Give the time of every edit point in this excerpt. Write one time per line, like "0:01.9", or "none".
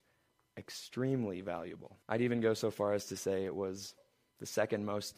0:02.0